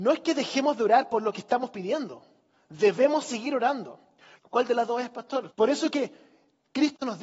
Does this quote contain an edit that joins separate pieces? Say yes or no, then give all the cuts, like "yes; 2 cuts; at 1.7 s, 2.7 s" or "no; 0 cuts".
yes; 2 cuts; at 4.4 s, 5.5 s